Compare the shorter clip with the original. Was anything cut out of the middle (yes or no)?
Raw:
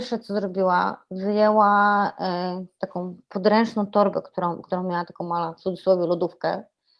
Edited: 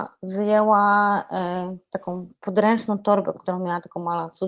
yes